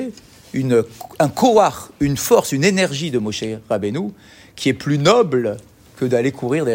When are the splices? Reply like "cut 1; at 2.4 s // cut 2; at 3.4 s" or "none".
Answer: none